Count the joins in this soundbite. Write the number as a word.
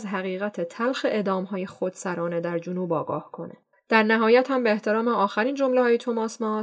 one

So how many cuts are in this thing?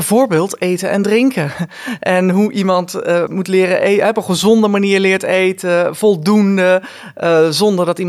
one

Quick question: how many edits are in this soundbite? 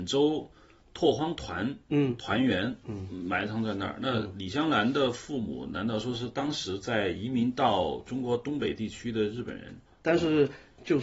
one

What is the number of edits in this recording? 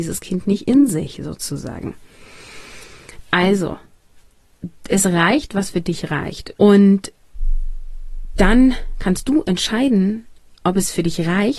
one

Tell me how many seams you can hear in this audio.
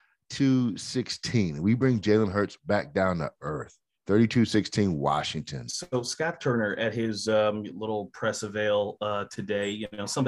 two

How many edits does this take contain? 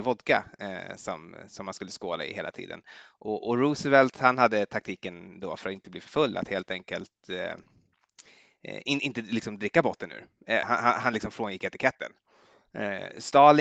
one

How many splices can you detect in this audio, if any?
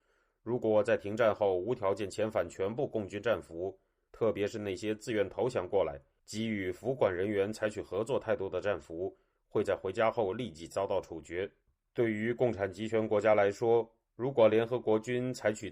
one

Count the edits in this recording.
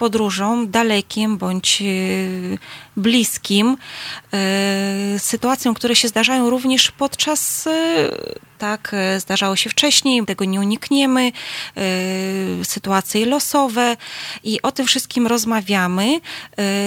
two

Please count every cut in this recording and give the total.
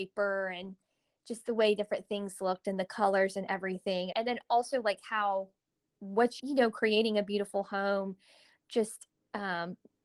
two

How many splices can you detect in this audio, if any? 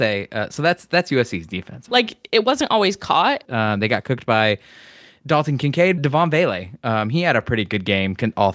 three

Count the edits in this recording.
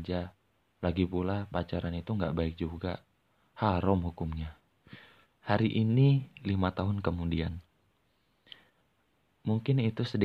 one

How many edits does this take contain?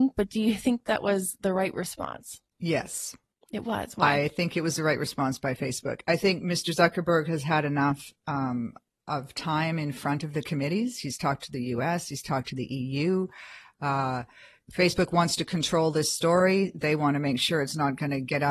zero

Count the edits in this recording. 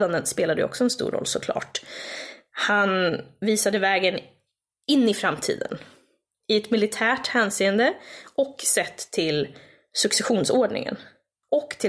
zero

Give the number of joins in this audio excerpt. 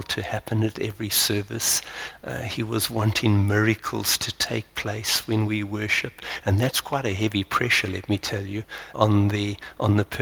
one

